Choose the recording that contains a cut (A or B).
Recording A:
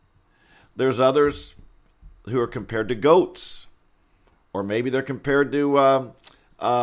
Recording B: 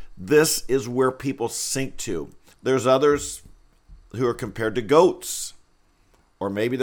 B